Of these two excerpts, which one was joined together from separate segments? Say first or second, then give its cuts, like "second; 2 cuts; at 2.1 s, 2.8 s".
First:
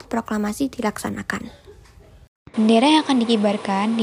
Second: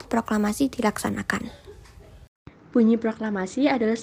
first; 1 cut; at 2.5 s